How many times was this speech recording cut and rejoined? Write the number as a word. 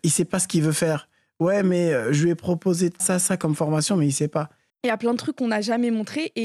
two